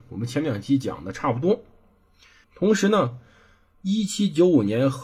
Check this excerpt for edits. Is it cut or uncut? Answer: cut